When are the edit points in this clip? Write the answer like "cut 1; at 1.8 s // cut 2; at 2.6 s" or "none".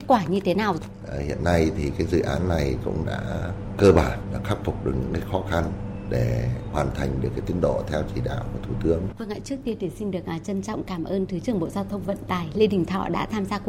cut 1; at 9.1 s